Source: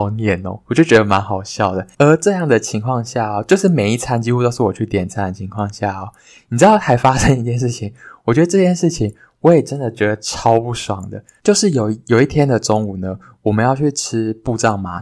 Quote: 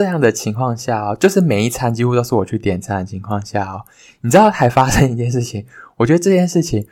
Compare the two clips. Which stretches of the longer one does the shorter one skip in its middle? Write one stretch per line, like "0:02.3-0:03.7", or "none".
none

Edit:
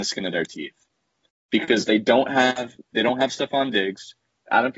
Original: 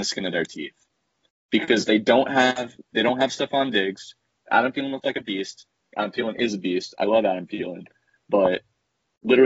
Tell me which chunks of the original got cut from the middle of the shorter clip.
none

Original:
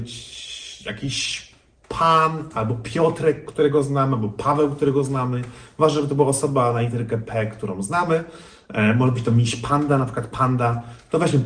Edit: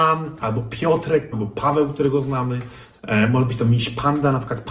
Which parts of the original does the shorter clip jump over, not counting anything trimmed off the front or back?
0:03.5-0:04.1
0:05.8-0:08.6

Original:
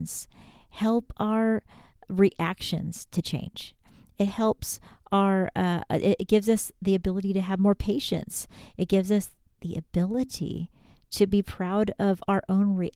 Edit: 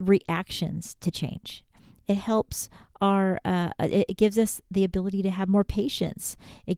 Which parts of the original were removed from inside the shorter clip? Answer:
none

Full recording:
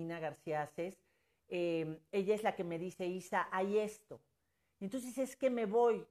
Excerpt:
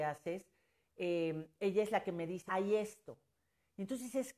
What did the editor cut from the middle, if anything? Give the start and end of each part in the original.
0:03.0-0:03.5

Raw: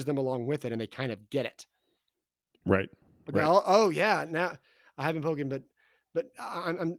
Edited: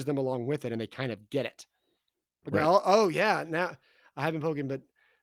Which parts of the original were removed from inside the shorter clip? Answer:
0:02.4-0:03.2

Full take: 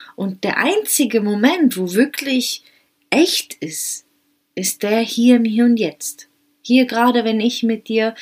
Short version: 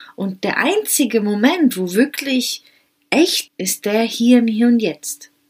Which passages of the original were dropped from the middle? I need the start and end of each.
0:03.5-0:04.5

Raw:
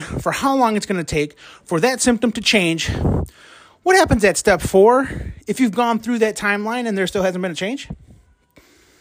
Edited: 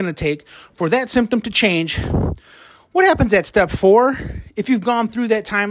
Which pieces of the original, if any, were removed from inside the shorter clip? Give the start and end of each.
none

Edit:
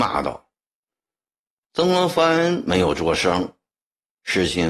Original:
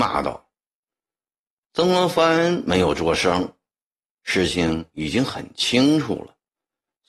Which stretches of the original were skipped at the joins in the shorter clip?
none

